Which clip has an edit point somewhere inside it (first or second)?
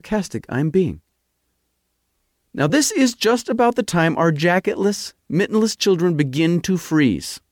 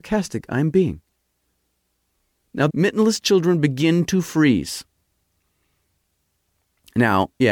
second